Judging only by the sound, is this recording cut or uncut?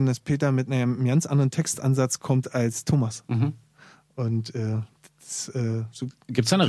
uncut